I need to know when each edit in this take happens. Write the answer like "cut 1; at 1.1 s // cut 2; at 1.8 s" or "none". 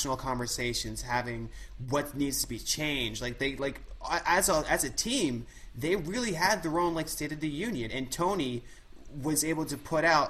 none